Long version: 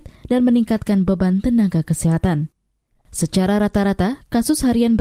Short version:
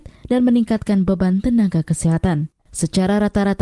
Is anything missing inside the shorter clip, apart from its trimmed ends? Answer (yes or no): yes